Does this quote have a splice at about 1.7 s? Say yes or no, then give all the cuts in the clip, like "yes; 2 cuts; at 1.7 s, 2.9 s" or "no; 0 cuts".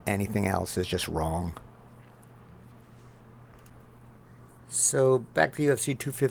no; 0 cuts